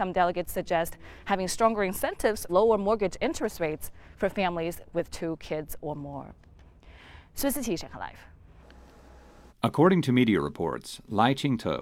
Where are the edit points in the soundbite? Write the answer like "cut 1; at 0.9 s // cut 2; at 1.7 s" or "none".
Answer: cut 1; at 2.5 s // cut 2; at 9.5 s

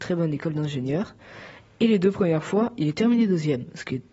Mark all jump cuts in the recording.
none

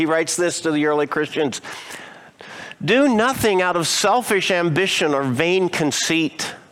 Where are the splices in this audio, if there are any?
none

